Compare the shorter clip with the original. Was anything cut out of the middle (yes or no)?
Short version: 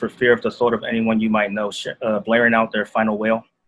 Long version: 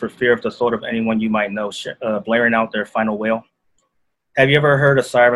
no